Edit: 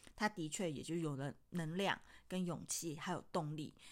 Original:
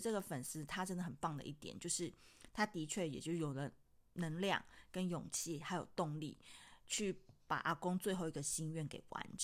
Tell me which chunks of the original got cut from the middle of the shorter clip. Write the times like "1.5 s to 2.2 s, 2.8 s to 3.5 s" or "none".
3.8 s to 4.1 s